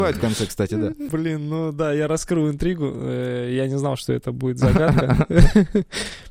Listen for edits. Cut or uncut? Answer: uncut